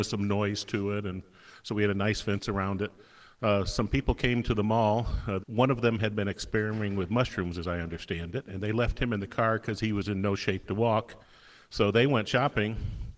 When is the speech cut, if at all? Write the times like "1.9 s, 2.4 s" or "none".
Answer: 5.4 s